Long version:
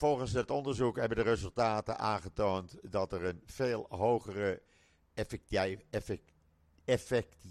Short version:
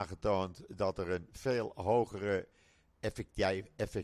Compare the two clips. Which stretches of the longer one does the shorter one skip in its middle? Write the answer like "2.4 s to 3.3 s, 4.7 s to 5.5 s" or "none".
none

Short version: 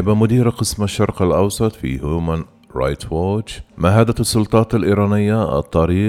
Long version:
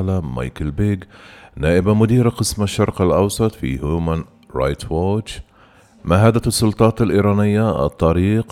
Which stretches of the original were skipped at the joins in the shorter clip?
5.5 s to 6.0 s

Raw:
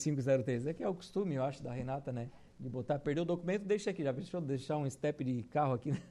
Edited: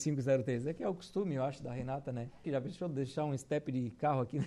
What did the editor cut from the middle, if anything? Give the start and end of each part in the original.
2.4 s to 4.0 s

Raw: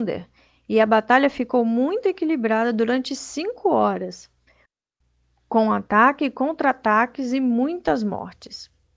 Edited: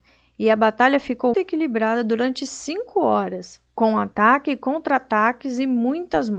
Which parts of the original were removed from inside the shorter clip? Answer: 1.6 s to 2.0 s, 4.3 s to 5.4 s

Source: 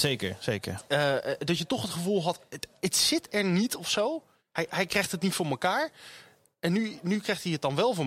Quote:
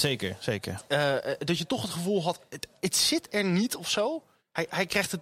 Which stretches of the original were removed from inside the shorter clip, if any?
none

